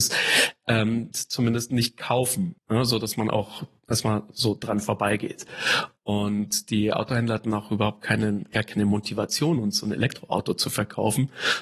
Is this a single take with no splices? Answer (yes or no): no